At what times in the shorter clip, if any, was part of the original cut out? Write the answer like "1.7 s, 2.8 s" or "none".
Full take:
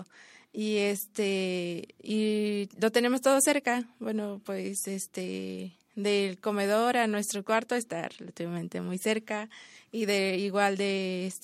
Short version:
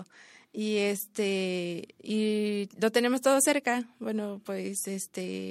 none